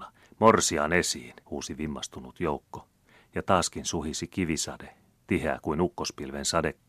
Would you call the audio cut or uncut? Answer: cut